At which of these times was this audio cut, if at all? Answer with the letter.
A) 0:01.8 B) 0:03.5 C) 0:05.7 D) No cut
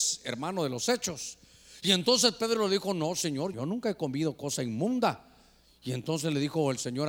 B